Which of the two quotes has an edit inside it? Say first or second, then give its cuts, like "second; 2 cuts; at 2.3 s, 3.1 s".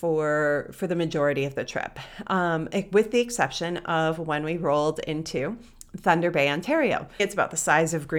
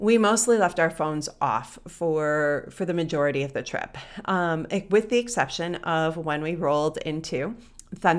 first; 1 cut; at 7.2 s